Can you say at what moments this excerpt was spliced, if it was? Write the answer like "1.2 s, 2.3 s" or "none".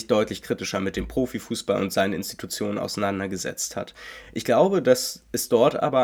none